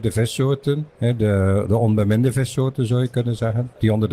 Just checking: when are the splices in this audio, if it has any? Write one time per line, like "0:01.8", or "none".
0:00.9